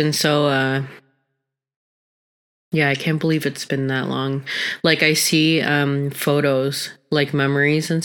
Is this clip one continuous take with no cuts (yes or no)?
yes